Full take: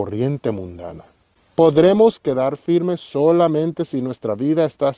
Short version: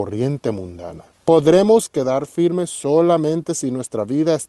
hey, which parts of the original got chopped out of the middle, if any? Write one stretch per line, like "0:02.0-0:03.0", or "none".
0:01.1-0:01.4